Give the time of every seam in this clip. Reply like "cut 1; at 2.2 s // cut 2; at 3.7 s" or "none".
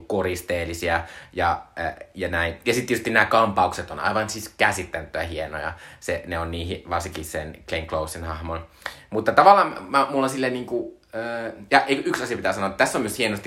none